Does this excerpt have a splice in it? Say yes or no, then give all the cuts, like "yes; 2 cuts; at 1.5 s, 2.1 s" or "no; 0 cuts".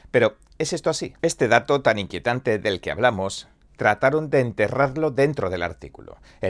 yes; 1 cut; at 1.2 s